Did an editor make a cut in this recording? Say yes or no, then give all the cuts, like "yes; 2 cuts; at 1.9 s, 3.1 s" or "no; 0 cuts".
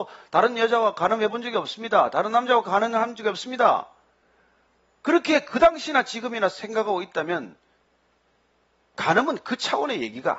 no; 0 cuts